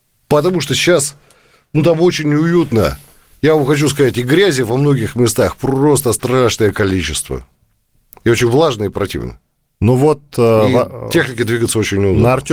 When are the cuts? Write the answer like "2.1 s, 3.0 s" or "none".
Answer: none